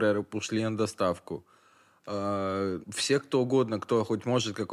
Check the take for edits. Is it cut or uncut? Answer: cut